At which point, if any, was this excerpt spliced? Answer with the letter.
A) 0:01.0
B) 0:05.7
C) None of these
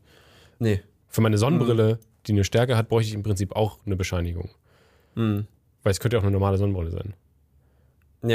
A